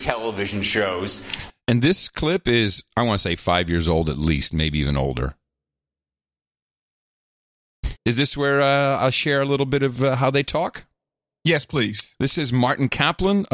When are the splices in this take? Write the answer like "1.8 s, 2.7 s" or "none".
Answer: 8.0 s